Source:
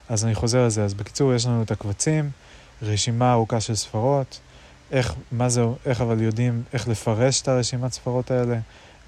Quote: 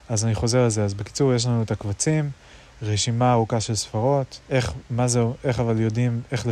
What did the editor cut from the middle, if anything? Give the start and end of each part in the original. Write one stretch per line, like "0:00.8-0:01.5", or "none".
0:04.4-0:04.8